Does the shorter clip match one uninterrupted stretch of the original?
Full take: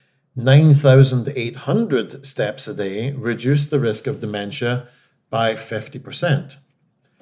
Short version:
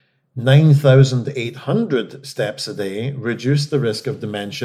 yes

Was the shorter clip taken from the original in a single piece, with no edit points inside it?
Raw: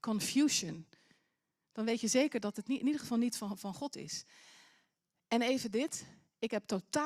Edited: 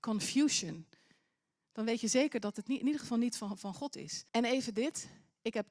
no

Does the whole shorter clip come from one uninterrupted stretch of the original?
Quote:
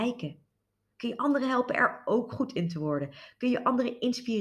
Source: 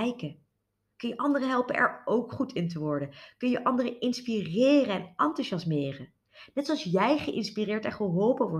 yes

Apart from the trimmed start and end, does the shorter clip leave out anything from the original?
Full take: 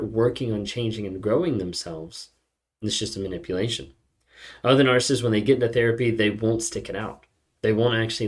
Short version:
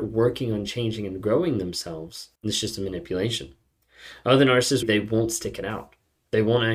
yes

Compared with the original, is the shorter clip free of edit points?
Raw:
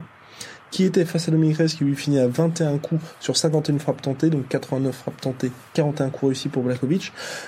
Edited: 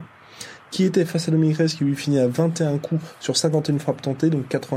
yes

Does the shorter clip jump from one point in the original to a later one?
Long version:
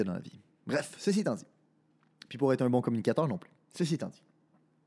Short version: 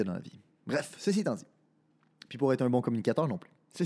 no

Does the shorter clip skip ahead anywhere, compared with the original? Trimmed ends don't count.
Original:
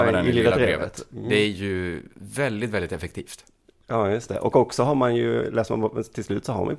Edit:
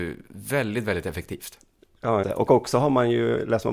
yes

